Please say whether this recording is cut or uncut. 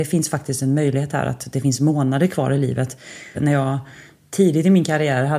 cut